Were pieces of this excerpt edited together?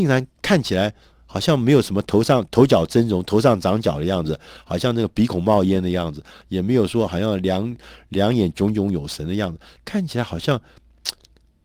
no; 0 cuts

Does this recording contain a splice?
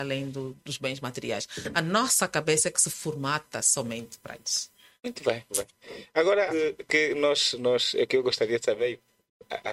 yes; 2 cuts; at 5.5 s, 6.5 s

